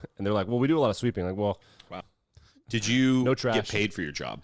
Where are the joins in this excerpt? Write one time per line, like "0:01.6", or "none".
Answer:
0:02.0